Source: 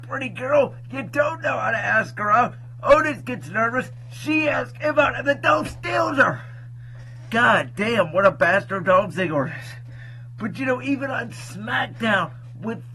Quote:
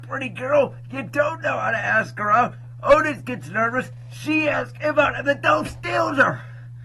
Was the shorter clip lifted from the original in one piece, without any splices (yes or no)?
yes